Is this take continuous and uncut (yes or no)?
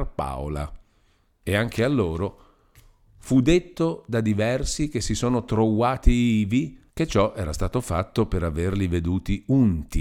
no